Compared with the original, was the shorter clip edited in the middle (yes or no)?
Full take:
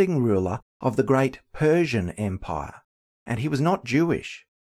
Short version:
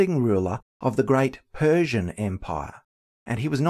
no